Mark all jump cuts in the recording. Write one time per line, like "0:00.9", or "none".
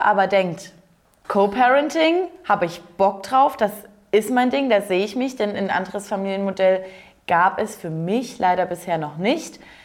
0:01.2